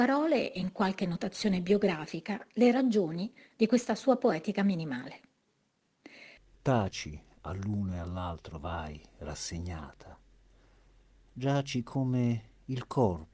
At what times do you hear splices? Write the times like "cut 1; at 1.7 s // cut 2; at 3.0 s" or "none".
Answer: cut 1; at 7.3 s // cut 2; at 11.1 s